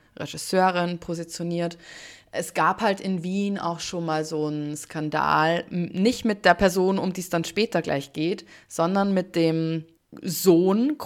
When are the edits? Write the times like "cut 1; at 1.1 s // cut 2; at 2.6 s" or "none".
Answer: none